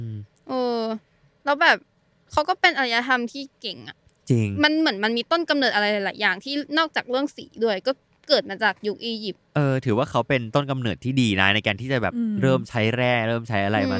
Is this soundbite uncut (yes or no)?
yes